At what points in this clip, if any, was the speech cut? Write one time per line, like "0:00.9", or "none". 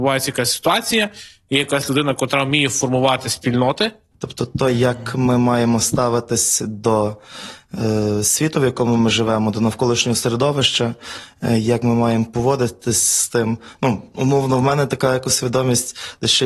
0:04.1